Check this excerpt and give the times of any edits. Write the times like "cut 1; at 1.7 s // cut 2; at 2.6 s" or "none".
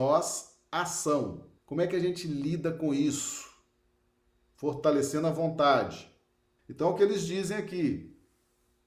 cut 1; at 1.6 s // cut 2; at 6.6 s